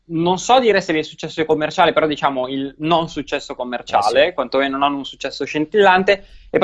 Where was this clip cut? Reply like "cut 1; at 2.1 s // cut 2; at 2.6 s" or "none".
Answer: none